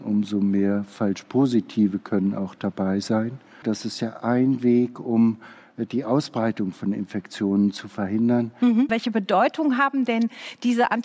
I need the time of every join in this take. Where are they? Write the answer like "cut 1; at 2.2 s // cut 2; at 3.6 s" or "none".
cut 1; at 3.6 s // cut 2; at 8.9 s

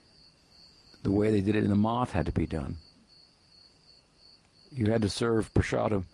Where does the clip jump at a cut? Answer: none

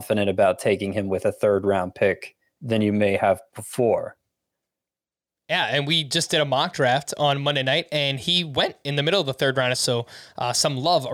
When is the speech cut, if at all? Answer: cut 1; at 9.7 s

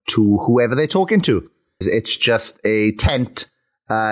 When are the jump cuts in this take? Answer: cut 1; at 1.8 s

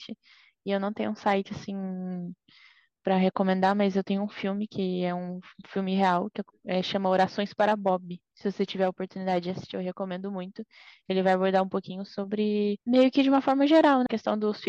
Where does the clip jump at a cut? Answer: none

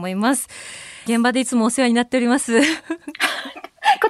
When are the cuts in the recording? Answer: cut 1; at 1.1 s

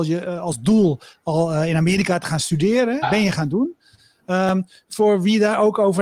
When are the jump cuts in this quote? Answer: cut 1; at 3.0 s

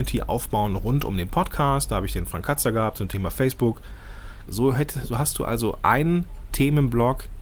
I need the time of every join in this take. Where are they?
cut 1; at 4.5 s

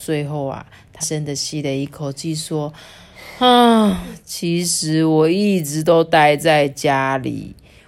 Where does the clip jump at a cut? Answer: cut 1; at 1.0 s

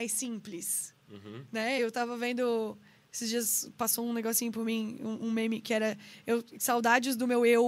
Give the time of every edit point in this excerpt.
none

